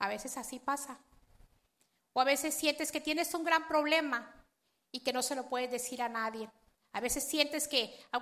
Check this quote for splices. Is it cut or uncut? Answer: cut